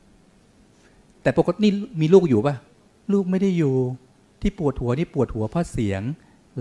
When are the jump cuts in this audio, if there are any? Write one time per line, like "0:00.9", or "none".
none